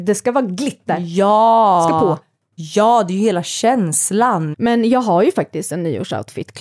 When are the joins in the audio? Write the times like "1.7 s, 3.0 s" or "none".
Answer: 4.5 s